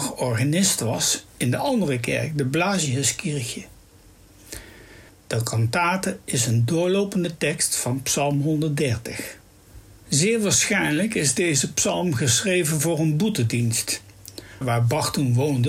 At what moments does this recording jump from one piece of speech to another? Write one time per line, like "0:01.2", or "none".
0:05.1
0:10.0
0:14.6